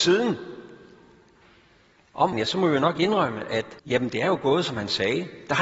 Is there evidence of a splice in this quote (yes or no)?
yes